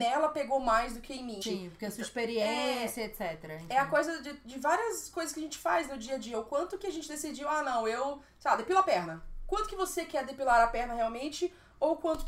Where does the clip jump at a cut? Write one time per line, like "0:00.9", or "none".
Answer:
0:01.4